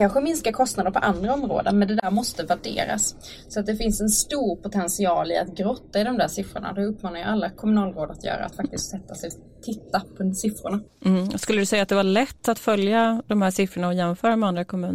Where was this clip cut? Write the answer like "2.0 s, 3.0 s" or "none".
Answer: none